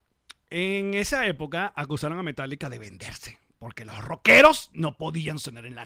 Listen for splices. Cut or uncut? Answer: uncut